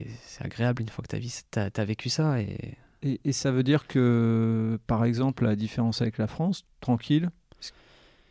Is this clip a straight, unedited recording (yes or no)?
no